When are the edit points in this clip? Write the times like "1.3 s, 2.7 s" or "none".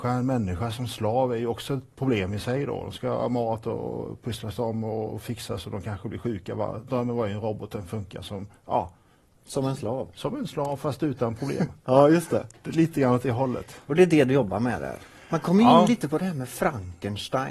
none